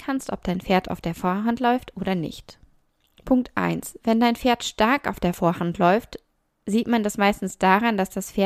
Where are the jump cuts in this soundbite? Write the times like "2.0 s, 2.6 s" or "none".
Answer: none

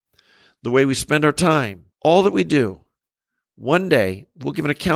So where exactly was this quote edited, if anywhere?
1.9 s

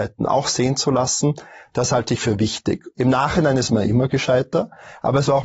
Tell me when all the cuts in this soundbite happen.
2.9 s

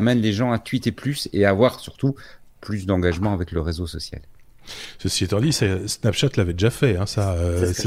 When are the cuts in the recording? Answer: none

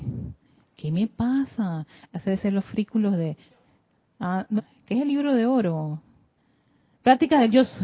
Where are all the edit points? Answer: 4.6 s

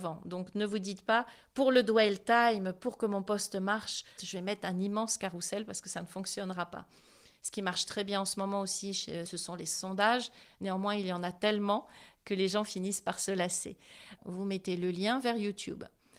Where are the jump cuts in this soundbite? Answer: 4.2 s, 9.3 s, 14.2 s

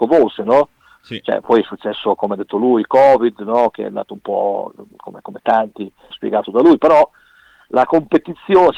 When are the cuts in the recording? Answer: 6.1 s

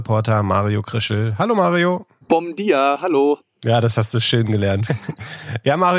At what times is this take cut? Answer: 4.9 s

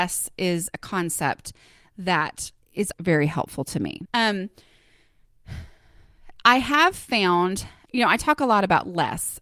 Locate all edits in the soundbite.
2.9 s, 4.1 s, 7.9 s

